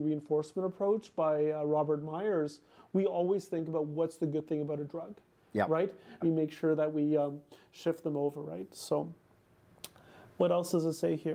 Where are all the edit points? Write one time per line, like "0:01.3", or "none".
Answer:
0:06.2